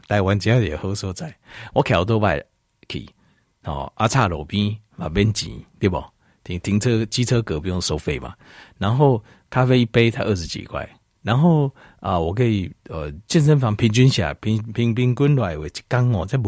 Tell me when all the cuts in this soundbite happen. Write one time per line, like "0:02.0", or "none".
none